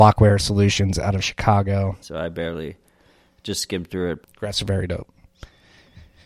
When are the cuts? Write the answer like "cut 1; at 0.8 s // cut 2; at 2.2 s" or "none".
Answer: cut 1; at 2.0 s // cut 2; at 4.2 s